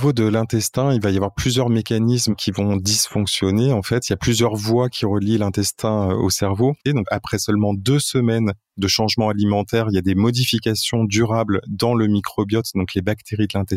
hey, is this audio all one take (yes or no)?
no